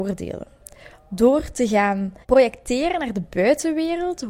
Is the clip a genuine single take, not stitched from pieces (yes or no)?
no